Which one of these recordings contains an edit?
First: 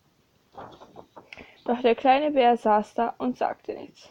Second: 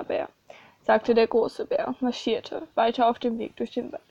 first; 1 cut; at 1.6 s

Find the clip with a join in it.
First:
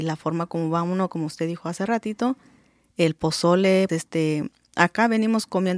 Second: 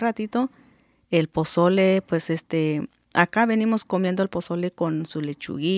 first; 1 cut; at 3.9 s

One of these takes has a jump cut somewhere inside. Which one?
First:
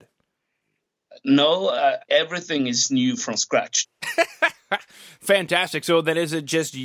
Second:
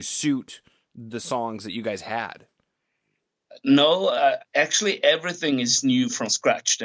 first; 2 cuts; at 2.1 s, 3.8 s

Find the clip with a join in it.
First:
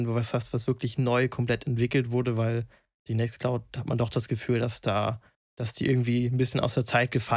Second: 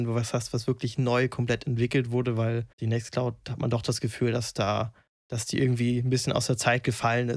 second; 1 cut; at 2.7 s

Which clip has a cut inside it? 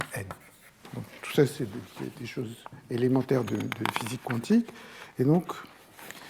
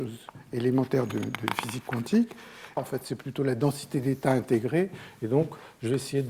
second; 1 cut; at 2.8 s

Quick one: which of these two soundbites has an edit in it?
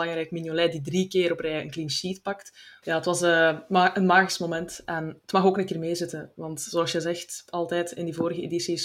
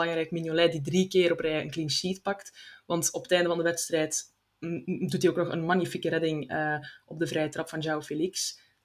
first; 1 cut; at 2.8 s

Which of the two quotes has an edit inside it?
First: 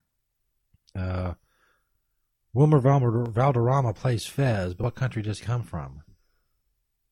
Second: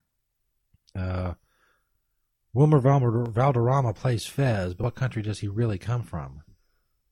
first; 1 cut; at 5.4 s

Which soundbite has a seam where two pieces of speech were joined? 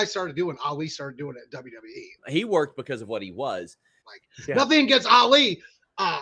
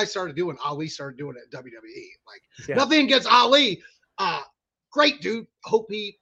first; 2 cuts; at 2.2 s, 4.0 s

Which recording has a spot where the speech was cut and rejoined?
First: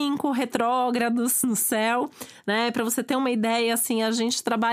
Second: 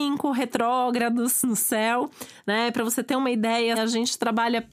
second; 1 cut; at 3.7 s

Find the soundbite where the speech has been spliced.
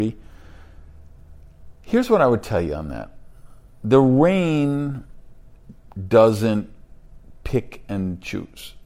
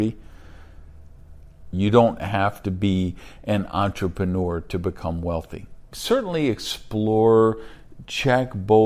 second; 2 cuts; at 1.7 s, 5.8 s

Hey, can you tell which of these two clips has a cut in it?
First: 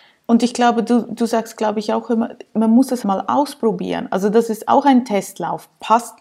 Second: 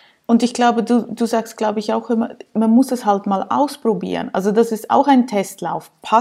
first; 1 cut; at 3.0 s

